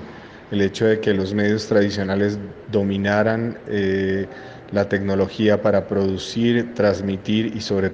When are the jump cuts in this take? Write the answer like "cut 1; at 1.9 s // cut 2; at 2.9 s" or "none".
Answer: none